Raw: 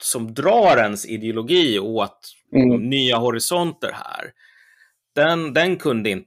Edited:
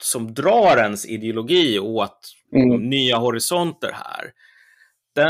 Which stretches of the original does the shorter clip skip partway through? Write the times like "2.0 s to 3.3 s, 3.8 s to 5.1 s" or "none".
none